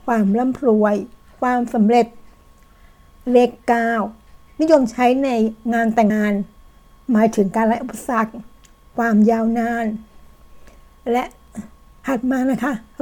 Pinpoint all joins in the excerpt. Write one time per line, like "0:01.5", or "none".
0:06.1

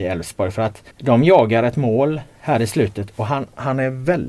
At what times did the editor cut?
0:00.9

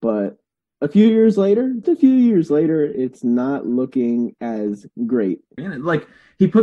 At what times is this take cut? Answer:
0:01.8
0:05.6

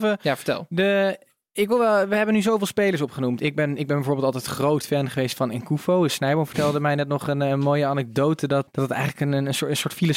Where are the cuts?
0:08.7

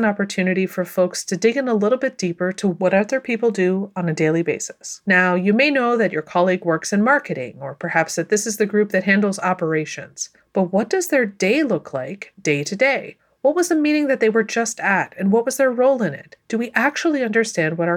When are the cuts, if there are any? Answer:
none

